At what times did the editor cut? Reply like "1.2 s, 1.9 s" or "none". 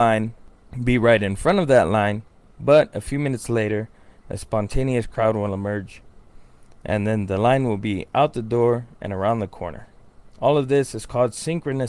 none